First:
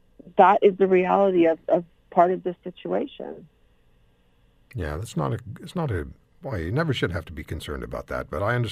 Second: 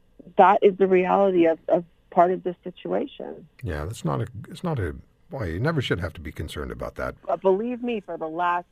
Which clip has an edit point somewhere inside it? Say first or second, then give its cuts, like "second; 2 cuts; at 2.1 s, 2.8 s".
second; 2 cuts; at 3.5 s, 7.2 s